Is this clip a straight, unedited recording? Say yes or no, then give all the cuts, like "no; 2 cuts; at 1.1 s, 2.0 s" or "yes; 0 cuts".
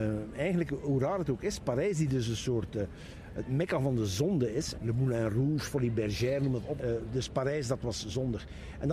no; 2 cuts; at 4.7 s, 6.8 s